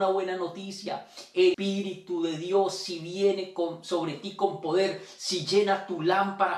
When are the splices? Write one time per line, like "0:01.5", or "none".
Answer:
0:01.5